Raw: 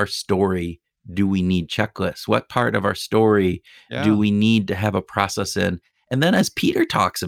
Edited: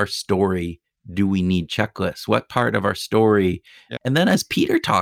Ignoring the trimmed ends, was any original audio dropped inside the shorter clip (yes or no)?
yes